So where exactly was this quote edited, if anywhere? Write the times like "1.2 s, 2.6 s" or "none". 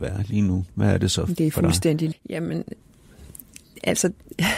2.1 s